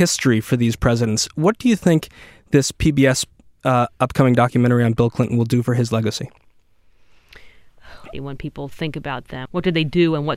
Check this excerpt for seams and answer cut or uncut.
cut